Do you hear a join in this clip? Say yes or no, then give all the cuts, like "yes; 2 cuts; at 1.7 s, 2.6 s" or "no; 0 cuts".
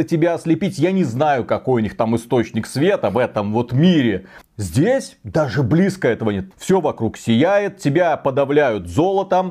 yes; 2 cuts; at 4.4 s, 6.5 s